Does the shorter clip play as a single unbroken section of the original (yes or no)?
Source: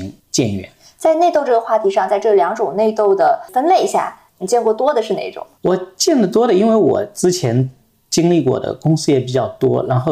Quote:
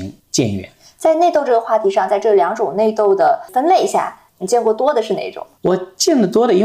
yes